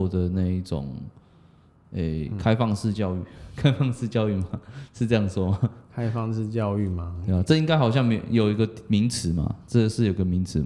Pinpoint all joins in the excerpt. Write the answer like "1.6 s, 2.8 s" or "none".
none